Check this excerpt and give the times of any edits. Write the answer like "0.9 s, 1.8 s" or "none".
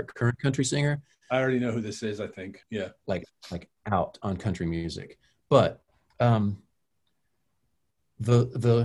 2.6 s